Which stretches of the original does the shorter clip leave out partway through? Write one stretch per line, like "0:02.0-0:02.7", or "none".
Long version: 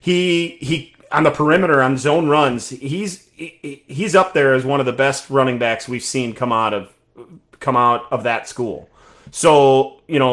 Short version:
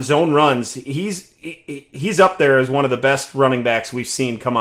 none